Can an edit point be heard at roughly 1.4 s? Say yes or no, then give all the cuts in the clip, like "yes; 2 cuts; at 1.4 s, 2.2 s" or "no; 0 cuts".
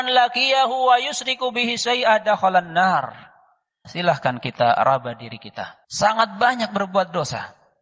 no; 2 cuts; at 3.8 s, 5.8 s